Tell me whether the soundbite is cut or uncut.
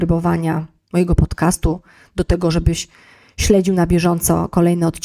uncut